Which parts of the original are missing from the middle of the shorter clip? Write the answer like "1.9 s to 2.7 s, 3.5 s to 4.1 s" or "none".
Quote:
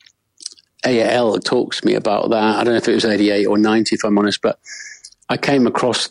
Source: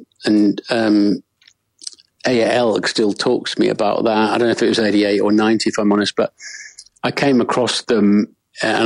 2.8 s to 3.1 s